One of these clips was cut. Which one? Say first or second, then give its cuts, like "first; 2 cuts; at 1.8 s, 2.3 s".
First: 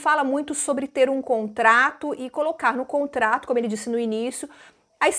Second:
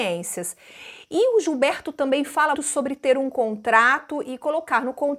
second; 1 cut; at 2.5 s